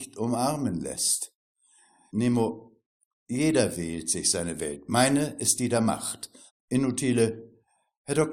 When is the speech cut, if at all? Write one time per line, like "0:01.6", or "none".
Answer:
0:02.1
0:06.5